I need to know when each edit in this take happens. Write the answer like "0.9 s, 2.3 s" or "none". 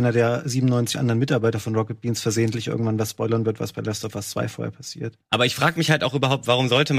none